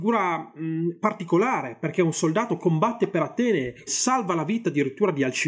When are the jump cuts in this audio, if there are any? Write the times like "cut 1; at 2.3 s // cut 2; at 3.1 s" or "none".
cut 1; at 3.9 s